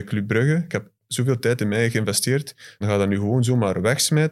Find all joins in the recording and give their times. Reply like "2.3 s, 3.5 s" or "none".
2.8 s